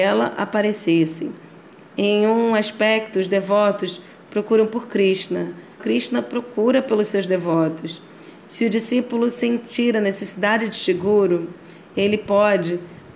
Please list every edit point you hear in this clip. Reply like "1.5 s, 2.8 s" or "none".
5.8 s

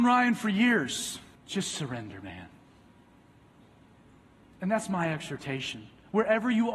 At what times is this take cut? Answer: 1.3 s

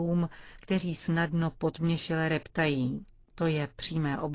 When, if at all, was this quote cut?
3.3 s

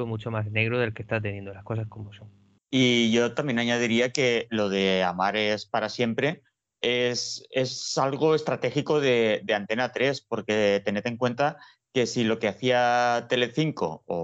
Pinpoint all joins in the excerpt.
none

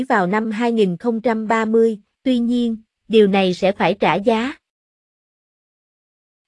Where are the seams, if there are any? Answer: 2.1 s

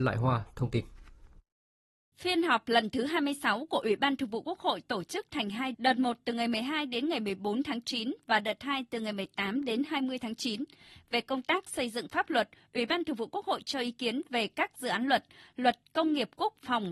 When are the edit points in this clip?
5.7 s

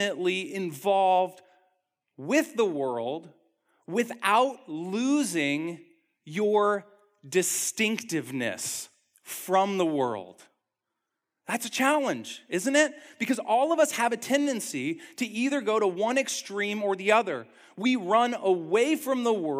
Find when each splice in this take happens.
none

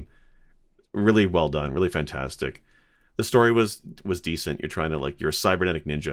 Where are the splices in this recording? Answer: none

